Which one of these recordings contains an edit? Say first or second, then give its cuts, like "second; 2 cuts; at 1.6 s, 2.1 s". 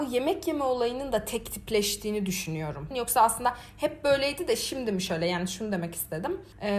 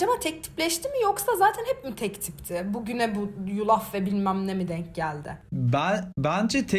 first; 1 cut; at 2.9 s